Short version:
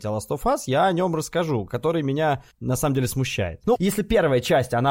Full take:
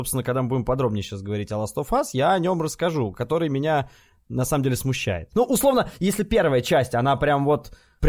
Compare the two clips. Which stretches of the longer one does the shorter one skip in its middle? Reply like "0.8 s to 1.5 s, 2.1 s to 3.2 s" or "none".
4.0 s to 4.2 s, 5.4 s to 6.0 s